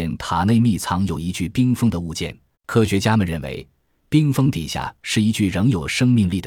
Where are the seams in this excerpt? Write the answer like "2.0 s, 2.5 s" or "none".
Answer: 2.5 s